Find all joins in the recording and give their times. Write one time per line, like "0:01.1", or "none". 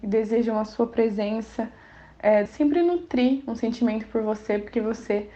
0:02.5